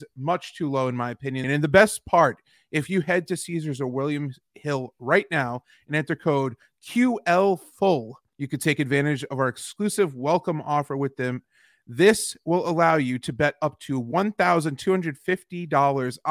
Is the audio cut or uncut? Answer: cut